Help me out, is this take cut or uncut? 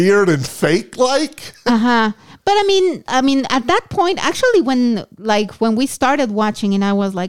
uncut